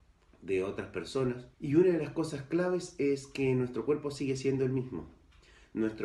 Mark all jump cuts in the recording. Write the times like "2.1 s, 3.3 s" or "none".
1.5 s